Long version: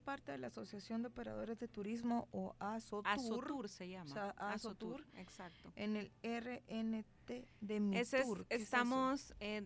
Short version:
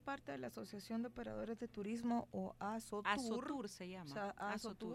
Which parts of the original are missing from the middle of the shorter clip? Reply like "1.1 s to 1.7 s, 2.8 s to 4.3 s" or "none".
none